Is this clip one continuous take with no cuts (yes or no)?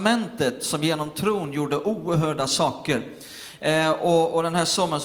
yes